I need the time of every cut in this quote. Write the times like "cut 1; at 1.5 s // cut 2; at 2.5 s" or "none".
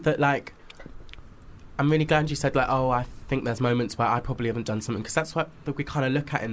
none